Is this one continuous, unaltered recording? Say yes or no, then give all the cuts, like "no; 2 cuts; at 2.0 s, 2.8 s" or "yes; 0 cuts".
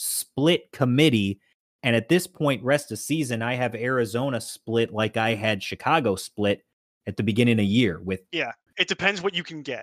no; 1 cut; at 8.7 s